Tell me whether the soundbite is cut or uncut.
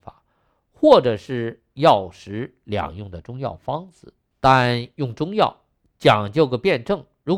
cut